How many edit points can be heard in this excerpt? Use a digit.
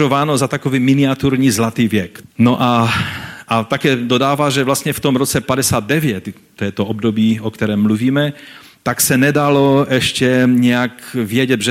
1